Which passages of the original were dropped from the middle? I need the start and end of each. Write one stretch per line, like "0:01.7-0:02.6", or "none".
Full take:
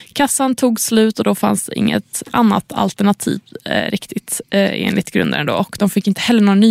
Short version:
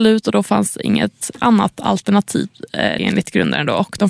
0:03.9-0:04.8